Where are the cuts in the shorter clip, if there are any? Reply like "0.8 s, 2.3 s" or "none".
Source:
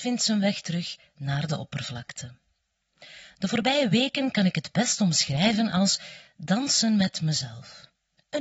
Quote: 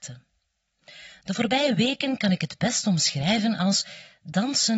none